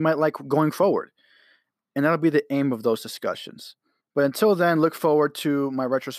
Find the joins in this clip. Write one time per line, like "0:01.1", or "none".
0:04.0